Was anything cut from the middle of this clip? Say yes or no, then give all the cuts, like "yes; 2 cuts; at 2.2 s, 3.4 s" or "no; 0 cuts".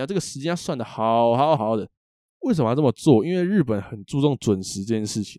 yes; 1 cut; at 1.6 s